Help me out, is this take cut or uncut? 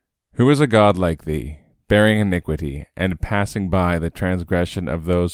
uncut